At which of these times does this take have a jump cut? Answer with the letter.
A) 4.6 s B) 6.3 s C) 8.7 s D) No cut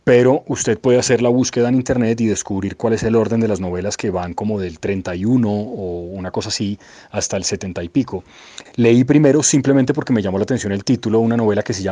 C